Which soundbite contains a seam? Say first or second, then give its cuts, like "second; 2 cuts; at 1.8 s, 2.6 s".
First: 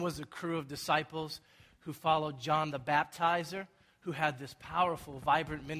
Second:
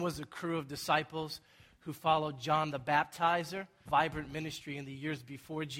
second; 1 cut; at 3.9 s